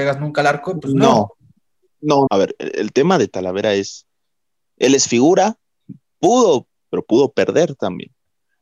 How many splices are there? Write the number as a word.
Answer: two